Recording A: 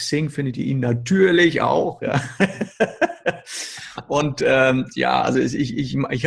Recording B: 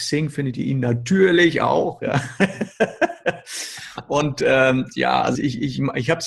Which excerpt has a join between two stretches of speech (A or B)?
B